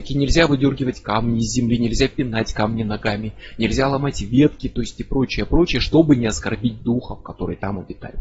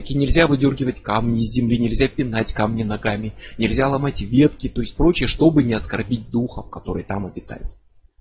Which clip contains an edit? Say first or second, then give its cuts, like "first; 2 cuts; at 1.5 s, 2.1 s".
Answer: second; 1 cut; at 5.0 s